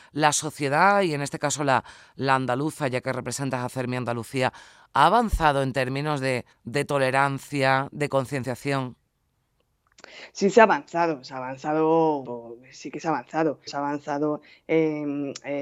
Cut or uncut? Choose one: cut